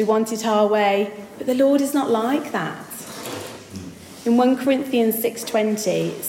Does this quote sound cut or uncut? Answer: uncut